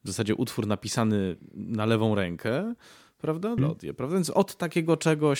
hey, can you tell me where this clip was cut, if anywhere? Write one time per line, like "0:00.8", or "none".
0:03.6